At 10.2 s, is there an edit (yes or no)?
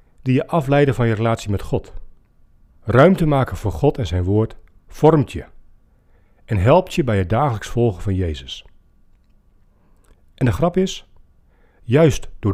no